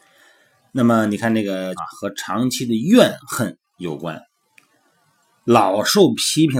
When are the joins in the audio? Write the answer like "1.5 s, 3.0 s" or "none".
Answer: 1.8 s